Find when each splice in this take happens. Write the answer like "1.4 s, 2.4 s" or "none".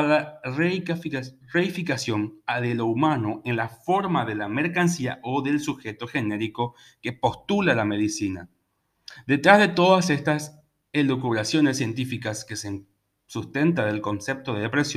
none